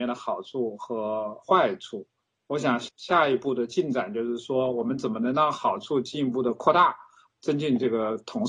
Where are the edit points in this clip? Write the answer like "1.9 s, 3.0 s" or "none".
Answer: 7.3 s